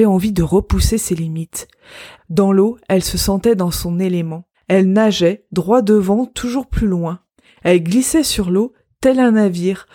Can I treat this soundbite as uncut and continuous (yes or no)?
no